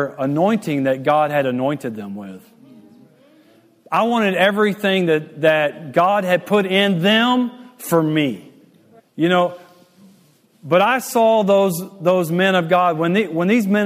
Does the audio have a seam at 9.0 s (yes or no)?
yes